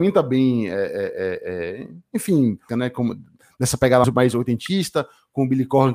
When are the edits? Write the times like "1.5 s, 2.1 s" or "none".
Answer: 2.7 s, 4.0 s